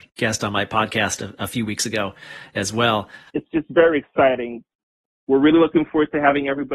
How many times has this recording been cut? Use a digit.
1